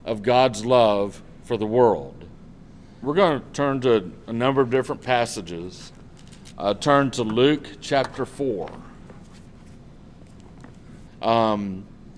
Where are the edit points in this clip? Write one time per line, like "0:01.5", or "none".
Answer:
0:03.0
0:06.5
0:11.1